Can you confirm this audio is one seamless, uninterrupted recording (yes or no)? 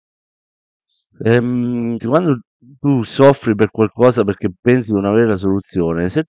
no